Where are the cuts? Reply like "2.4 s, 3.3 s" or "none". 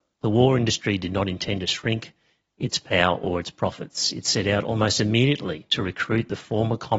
none